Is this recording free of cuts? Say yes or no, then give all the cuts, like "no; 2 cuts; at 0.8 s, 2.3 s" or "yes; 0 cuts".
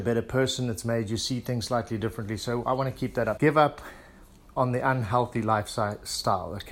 no; 1 cut; at 3.4 s